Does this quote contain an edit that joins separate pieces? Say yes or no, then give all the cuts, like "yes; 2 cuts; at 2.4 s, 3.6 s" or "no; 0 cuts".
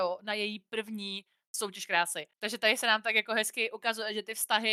no; 0 cuts